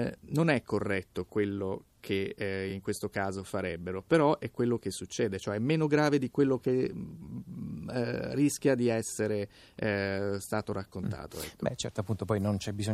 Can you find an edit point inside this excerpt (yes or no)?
no